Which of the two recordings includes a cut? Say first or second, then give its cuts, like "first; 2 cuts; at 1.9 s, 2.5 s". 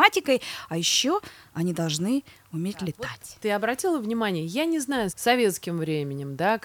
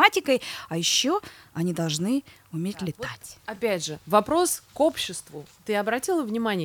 first; 2 cuts; at 3.4 s, 5.1 s